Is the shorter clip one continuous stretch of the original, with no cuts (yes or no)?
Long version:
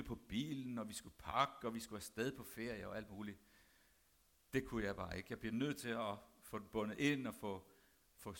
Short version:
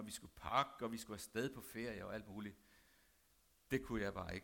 yes